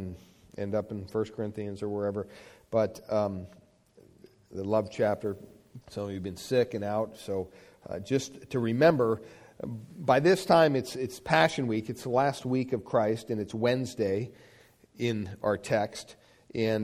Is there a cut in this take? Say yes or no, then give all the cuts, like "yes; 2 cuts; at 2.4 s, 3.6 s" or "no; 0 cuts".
yes; 1 cut; at 5.8 s